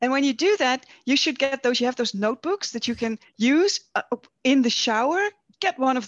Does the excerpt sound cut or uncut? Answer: cut